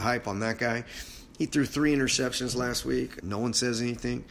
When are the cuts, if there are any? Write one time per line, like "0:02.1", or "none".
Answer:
0:03.2